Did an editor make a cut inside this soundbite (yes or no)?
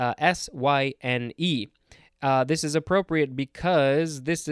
no